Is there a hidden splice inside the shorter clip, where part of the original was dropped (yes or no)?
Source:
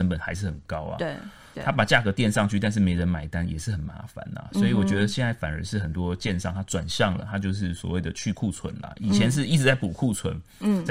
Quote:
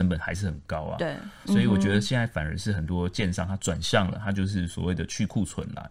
yes